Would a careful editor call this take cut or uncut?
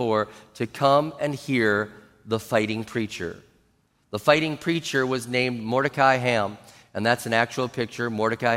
uncut